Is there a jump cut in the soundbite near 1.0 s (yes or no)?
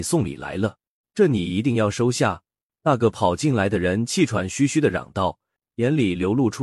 yes